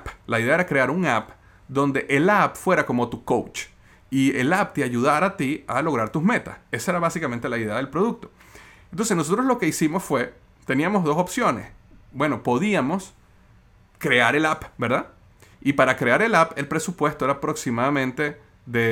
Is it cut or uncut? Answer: uncut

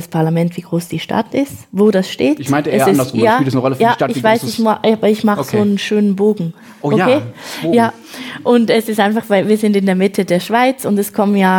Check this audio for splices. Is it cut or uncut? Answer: uncut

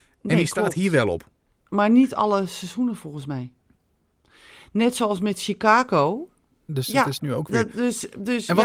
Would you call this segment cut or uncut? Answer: cut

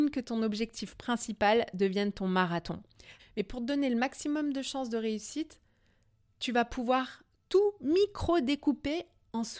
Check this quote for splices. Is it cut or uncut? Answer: cut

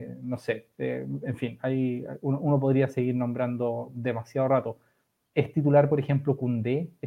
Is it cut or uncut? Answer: uncut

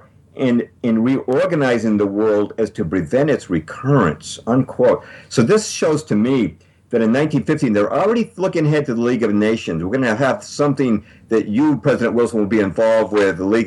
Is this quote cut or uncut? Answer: uncut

